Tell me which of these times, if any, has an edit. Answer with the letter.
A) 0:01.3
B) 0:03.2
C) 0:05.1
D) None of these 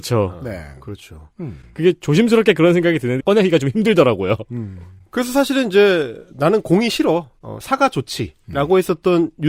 B